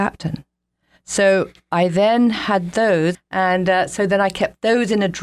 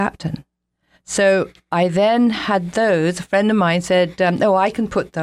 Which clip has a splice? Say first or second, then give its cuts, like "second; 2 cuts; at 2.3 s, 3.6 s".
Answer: first; 1 cut; at 3.1 s